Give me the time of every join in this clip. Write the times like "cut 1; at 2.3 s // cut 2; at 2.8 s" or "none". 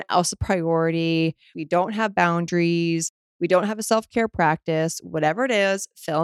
cut 1; at 1.5 s